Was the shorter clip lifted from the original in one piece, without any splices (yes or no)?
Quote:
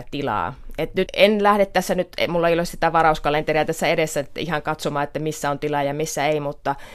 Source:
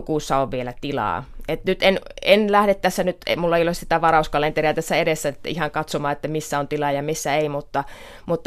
no